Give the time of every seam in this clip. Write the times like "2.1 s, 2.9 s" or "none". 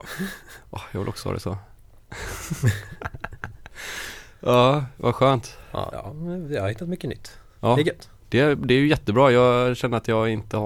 5.9 s